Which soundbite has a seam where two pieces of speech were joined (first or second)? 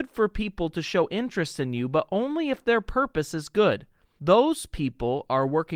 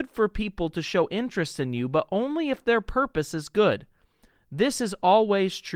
first